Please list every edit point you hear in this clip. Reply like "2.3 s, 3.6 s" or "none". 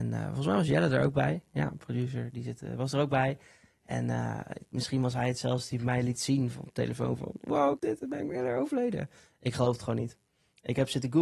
7.8 s

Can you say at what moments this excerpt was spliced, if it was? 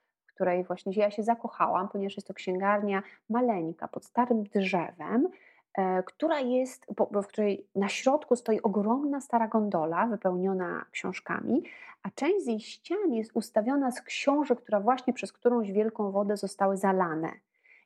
none

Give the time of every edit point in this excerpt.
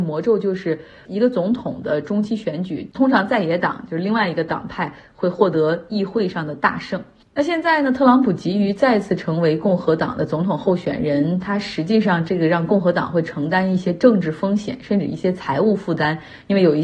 none

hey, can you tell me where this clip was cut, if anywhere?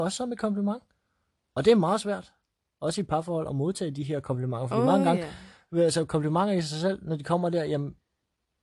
none

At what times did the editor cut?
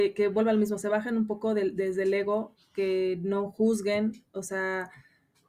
none

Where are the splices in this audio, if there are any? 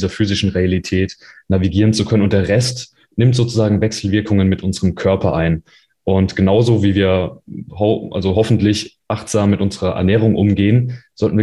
none

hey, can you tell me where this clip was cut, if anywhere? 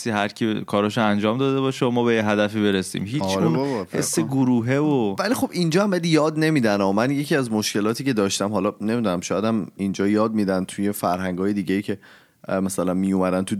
none

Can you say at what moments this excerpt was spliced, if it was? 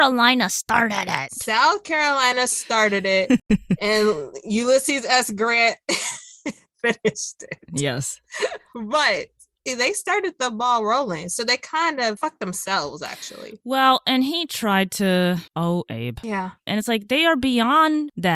15.5 s, 16.7 s

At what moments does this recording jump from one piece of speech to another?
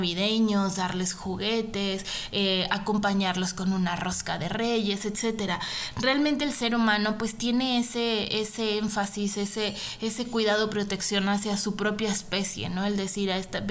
none

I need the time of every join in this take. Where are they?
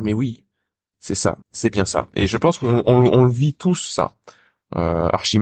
1.4 s

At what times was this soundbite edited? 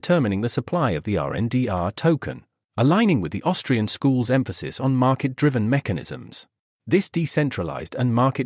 6.7 s

